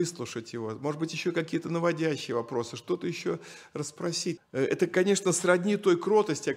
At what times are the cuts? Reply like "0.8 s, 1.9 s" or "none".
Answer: 4.4 s